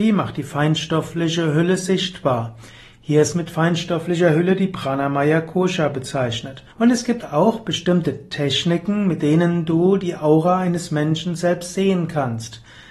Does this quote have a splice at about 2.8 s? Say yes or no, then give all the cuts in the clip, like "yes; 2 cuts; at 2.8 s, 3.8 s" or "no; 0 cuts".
no; 1 cut; at 6.7 s